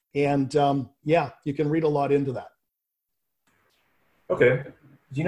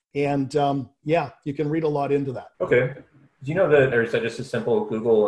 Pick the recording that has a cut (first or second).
second